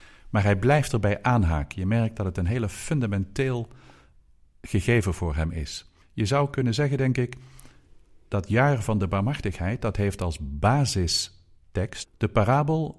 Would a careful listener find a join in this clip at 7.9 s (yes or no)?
no